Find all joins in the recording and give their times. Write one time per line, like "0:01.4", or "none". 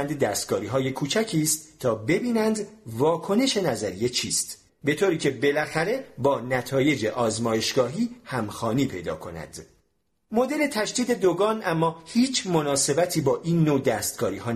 0:04.7